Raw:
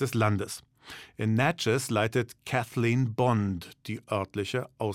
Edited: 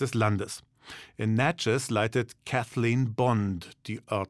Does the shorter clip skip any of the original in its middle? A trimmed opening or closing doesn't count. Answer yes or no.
no